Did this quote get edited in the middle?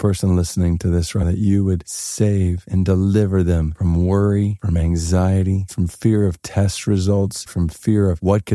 yes; 3 cuts; at 1.2 s, 5.7 s, 7.5 s

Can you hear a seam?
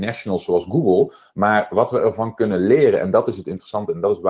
no; 0 cuts

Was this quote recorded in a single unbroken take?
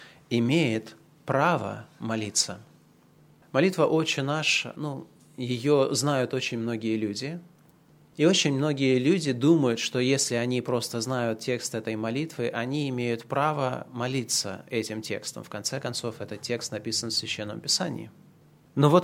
yes; 0 cuts

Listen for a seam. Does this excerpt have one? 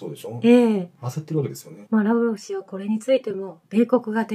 no; 0 cuts

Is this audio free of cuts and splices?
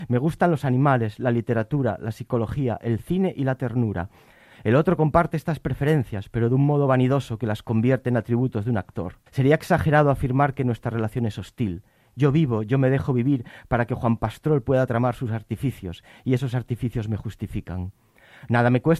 no; 1 cut; at 9.3 s

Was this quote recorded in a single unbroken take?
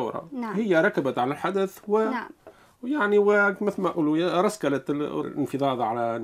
no; 1 cut; at 5.2 s

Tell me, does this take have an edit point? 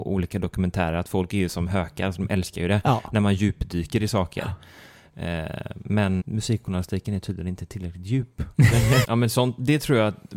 yes; 2 cuts; at 6.2 s, 9.0 s

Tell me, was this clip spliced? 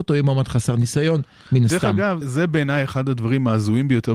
yes; 1 cut; at 2.2 s

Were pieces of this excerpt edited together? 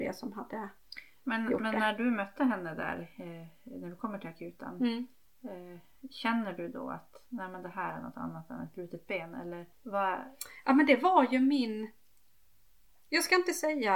yes; 1 cut; at 9.7 s

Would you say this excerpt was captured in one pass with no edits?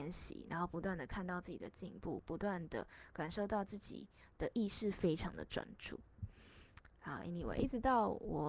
yes; 0 cuts

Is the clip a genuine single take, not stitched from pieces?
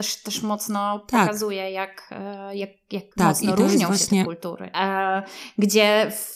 no; 2 cuts; at 3.1 s, 4.7 s

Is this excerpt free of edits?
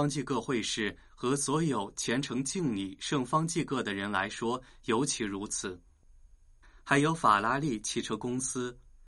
no; 1 cut; at 6.6 s

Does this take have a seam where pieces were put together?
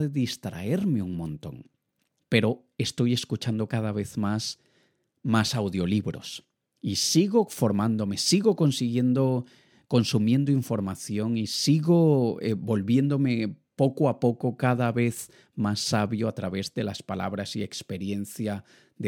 yes; 1 cut; at 2.2 s

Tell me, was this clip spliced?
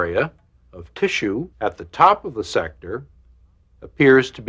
yes; 1 cut; at 1.5 s

